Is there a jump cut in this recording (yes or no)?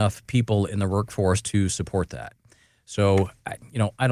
no